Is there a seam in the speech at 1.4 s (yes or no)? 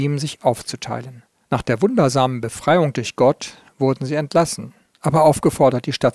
yes